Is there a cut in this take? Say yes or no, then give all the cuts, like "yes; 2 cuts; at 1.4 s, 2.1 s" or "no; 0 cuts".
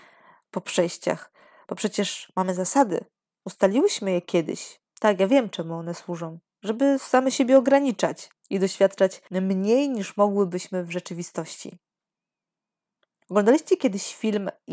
no; 0 cuts